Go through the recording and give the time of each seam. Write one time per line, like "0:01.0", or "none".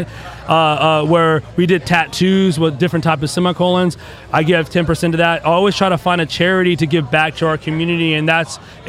none